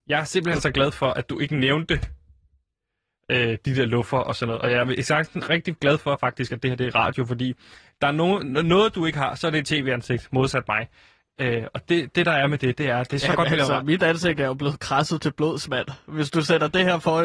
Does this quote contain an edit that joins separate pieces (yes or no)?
no